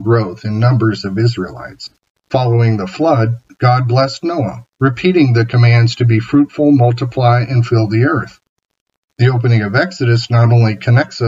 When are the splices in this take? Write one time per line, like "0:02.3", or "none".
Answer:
0:02.2
0:04.7
0:09.0

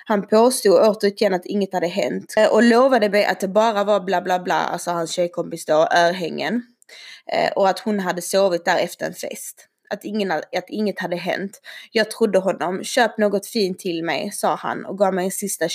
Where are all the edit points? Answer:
0:02.4

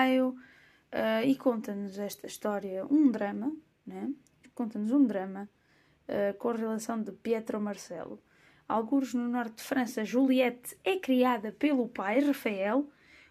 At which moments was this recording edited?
none

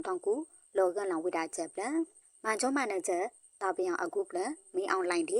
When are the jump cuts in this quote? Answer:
none

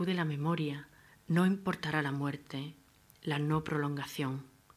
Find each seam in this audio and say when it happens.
0:01.1

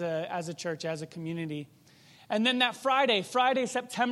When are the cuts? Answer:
none

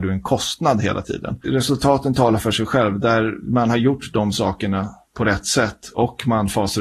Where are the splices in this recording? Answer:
0:01.4

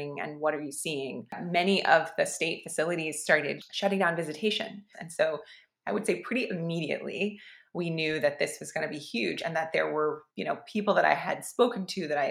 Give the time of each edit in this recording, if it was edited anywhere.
0:04.9
0:10.3

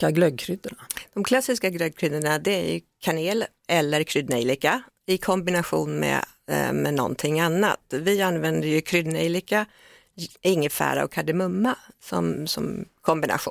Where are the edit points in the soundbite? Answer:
none

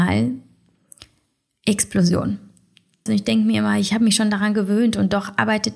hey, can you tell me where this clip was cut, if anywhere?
0:03.1

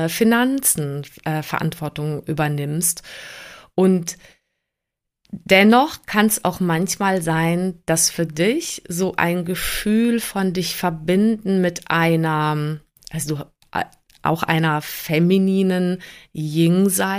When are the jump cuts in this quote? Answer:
none

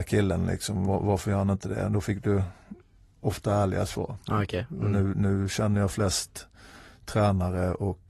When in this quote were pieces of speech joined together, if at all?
none

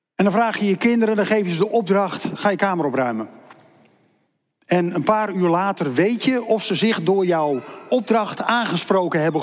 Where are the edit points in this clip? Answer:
none

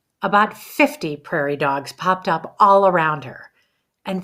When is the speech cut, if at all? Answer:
none

